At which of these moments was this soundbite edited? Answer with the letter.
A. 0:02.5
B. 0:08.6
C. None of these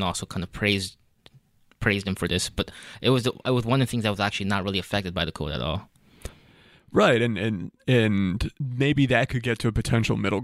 B